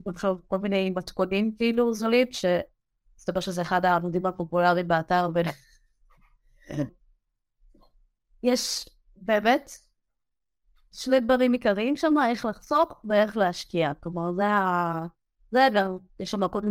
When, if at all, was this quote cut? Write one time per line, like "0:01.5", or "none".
0:06.9